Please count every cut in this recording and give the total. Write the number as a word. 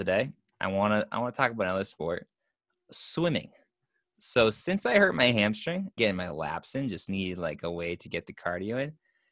one